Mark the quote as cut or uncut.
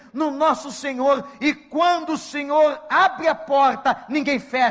uncut